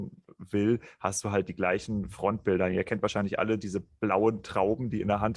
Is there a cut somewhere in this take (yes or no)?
no